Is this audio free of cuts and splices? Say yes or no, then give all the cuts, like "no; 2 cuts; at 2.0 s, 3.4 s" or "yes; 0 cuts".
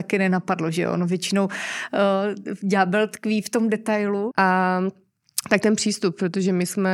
no; 1 cut; at 4.3 s